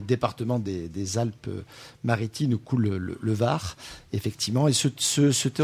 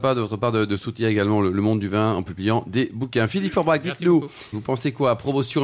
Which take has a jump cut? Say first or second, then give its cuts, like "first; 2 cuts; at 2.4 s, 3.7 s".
second; 1 cut; at 4.5 s